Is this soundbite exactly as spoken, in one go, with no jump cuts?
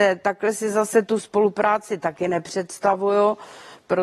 yes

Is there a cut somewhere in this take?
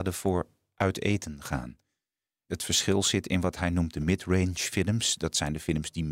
yes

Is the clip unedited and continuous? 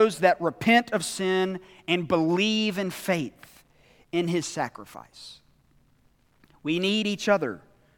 yes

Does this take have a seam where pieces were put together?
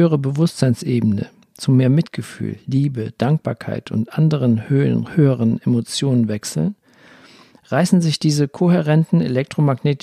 no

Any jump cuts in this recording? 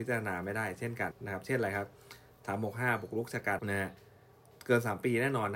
yes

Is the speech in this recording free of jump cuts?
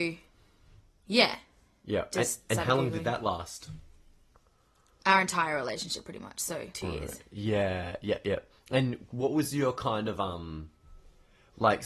no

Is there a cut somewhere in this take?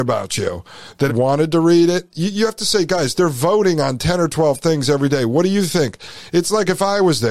yes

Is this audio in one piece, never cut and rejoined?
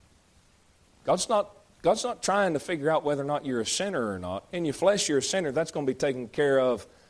yes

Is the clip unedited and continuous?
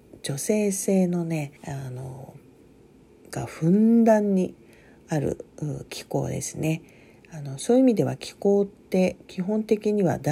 no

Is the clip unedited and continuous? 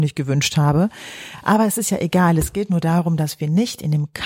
yes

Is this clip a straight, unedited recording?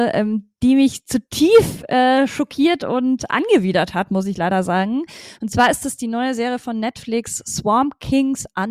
yes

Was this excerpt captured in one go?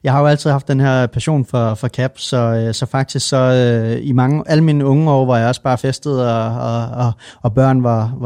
yes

